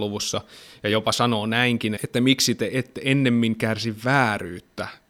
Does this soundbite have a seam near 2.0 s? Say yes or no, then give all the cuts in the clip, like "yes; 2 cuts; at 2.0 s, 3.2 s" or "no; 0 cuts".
yes; 1 cut; at 2.0 s